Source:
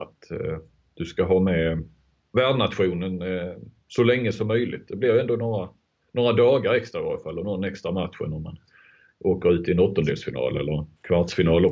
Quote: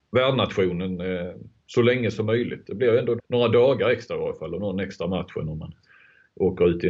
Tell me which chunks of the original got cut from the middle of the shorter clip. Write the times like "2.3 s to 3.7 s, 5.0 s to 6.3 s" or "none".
5.4 s to 6.0 s